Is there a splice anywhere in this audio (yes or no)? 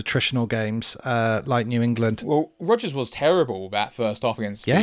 no